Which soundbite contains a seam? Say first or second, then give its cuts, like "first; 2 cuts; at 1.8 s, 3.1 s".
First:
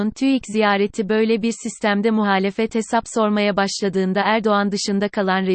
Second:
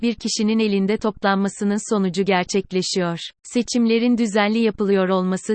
second; 1 cut; at 3.4 s